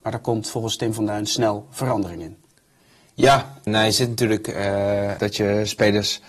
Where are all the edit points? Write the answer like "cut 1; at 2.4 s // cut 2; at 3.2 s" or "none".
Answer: cut 1; at 3.7 s // cut 2; at 5.2 s